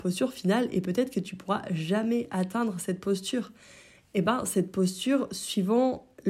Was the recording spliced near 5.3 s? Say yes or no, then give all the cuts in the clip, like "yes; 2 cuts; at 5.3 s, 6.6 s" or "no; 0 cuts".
no; 1 cut; at 4.0 s